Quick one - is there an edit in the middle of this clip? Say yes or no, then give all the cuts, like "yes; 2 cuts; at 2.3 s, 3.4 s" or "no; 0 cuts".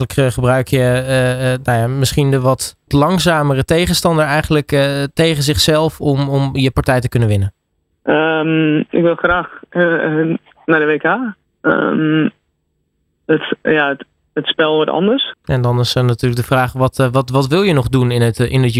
yes; 3 cuts; at 7.9 s, 11.5 s, 15.3 s